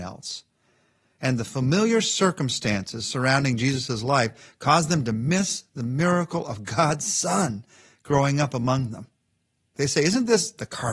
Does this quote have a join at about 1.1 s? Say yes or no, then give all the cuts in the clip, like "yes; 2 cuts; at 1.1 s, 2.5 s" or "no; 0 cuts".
no; 1 cut; at 9.8 s